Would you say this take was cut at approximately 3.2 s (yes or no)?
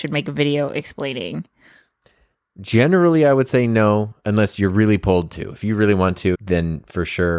no